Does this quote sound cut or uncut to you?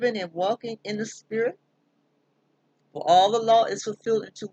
cut